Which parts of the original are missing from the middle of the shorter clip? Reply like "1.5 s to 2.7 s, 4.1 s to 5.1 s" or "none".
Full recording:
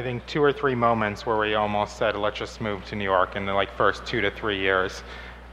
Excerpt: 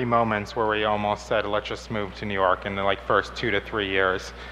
none